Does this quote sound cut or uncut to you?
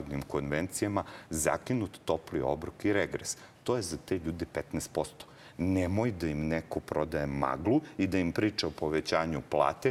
cut